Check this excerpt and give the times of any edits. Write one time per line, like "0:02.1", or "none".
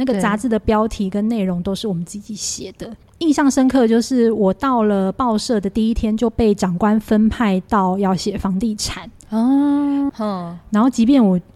0:10.1